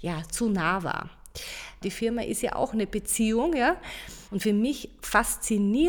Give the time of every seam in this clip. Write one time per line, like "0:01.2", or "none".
0:01.8
0:04.3